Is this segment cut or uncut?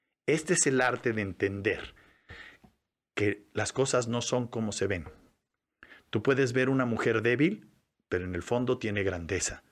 uncut